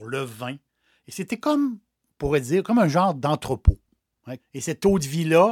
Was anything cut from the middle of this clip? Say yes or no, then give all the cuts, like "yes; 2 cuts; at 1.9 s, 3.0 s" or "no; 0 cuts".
yes; 1 cut; at 4.4 s